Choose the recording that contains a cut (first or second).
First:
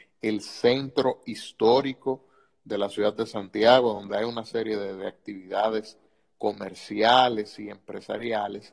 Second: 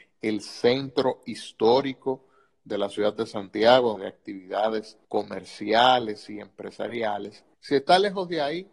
second